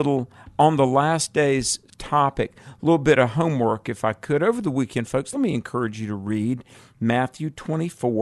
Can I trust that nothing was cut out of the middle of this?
yes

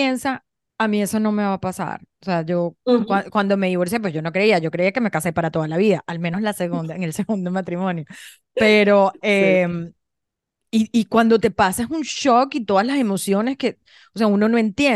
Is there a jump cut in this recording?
no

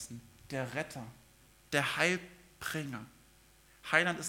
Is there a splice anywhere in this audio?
yes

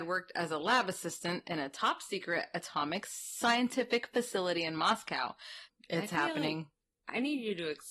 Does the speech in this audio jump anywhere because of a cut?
yes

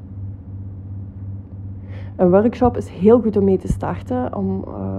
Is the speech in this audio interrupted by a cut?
no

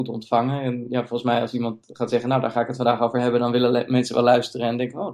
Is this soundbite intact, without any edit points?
yes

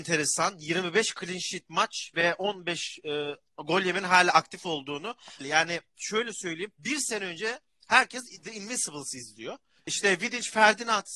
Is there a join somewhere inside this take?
yes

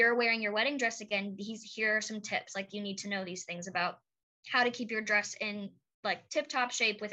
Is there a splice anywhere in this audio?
no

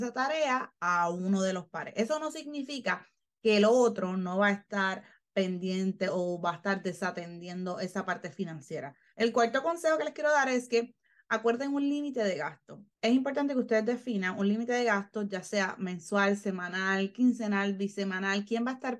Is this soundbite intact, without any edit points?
no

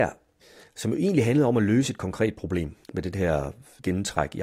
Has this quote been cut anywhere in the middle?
yes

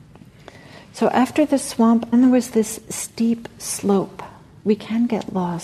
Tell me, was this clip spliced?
yes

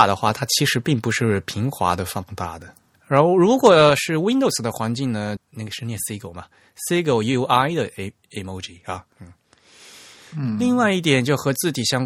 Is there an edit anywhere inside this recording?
yes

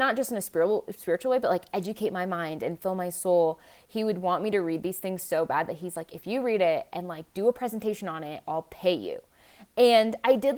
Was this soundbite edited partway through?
no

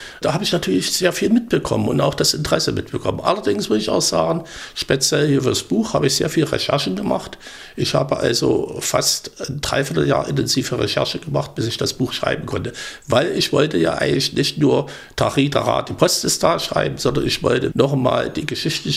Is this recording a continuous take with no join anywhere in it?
no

